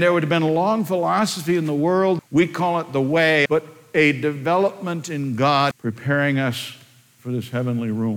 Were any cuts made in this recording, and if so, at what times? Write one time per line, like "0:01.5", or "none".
0:02.2
0:03.5
0:05.7